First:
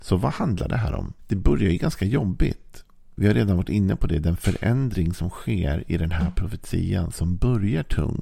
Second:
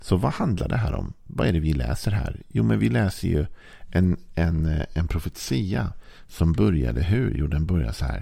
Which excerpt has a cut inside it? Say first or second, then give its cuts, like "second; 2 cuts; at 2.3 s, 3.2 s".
first; 1 cut; at 1.2 s